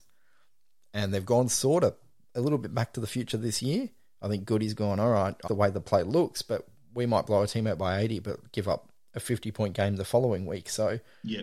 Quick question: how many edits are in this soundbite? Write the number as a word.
one